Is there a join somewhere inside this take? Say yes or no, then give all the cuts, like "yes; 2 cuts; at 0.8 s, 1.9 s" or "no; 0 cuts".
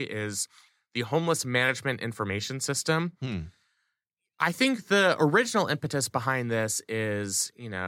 no; 0 cuts